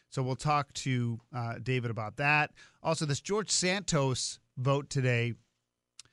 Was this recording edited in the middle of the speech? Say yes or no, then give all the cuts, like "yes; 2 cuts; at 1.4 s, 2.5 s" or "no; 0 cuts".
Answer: no; 0 cuts